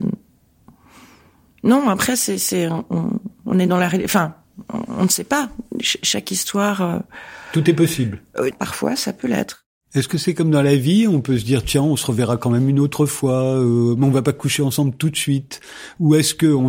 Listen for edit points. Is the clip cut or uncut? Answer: cut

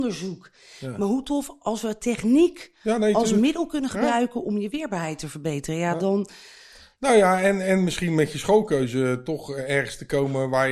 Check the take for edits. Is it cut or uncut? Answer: uncut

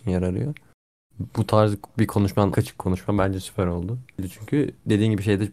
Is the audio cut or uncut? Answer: cut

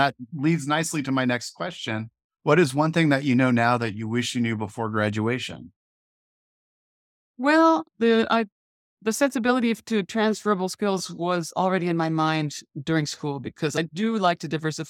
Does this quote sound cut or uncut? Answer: uncut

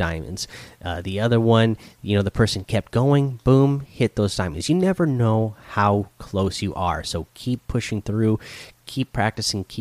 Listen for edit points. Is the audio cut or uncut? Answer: uncut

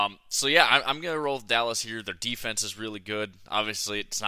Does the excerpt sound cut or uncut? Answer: uncut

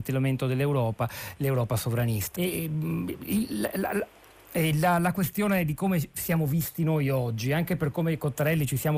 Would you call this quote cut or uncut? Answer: cut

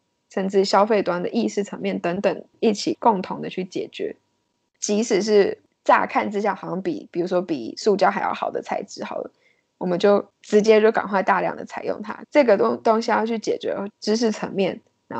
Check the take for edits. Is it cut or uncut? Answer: cut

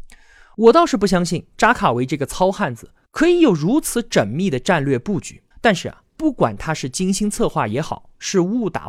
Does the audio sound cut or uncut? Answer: cut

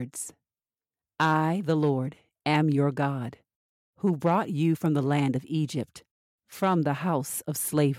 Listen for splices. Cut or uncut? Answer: uncut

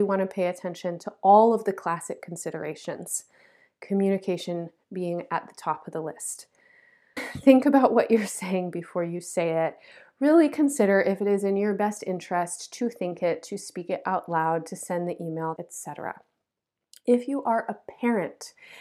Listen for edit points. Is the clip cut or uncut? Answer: cut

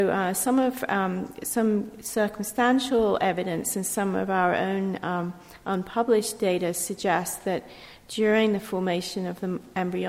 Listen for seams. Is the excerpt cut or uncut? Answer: uncut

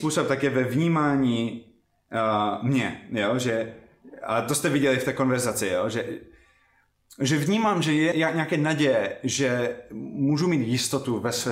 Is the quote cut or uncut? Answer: cut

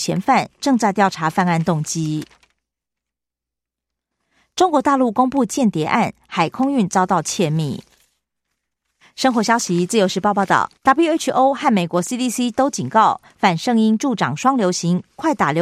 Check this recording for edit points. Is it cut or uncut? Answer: cut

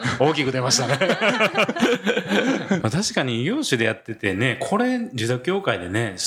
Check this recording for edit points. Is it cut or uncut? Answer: cut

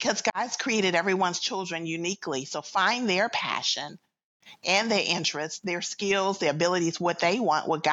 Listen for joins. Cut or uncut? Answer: uncut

